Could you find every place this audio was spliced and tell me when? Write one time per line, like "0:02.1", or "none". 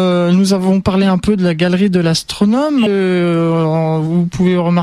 0:02.9